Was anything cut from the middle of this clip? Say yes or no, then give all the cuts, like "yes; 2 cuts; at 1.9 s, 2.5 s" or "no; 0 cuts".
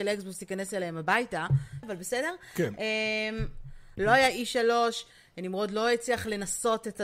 yes; 2 cuts; at 1.8 s, 4.0 s